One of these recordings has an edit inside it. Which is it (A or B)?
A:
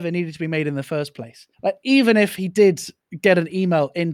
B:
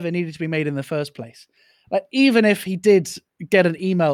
A